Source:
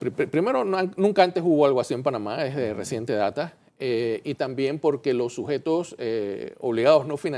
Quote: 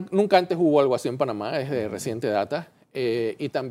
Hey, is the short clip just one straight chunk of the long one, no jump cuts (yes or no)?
yes